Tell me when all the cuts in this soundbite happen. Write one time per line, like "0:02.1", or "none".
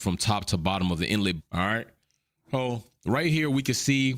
0:01.4